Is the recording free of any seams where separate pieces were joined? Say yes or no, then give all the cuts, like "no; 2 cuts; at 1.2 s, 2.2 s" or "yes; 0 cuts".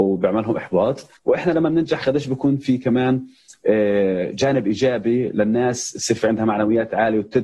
no; 1 cut; at 1.2 s